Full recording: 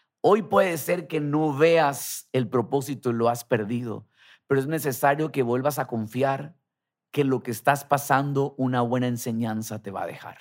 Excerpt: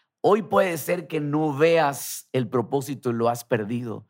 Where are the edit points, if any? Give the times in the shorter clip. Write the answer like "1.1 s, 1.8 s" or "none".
none